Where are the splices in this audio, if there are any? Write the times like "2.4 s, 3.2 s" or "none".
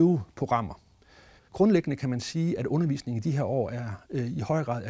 1.4 s